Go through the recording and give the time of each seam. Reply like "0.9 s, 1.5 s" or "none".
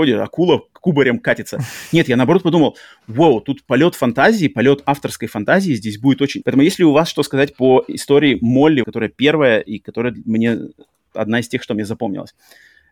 6.4 s, 8.8 s